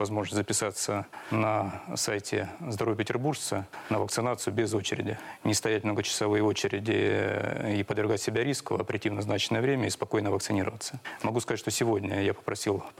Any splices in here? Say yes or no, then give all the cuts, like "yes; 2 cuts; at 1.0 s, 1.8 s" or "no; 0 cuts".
no; 0 cuts